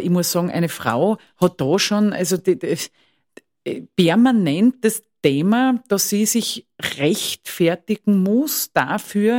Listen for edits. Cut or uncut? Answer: uncut